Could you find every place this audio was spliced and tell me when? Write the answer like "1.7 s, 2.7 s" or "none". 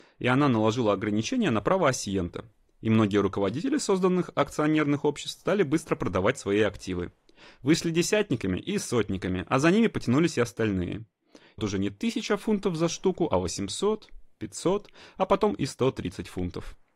11.6 s